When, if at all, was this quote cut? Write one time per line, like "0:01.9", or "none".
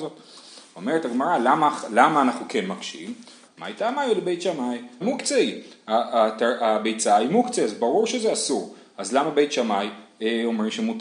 0:03.4
0:05.0